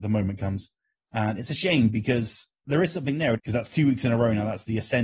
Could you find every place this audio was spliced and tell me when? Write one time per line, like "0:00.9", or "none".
0:00.9
0:03.3